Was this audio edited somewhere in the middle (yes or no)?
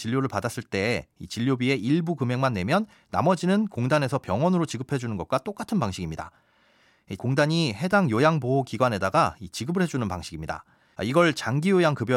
yes